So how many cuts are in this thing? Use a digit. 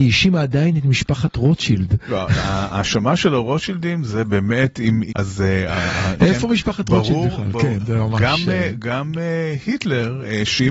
1